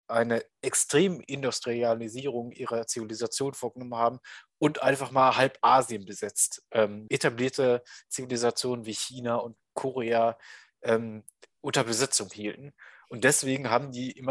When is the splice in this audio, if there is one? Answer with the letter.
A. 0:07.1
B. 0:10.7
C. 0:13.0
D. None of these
A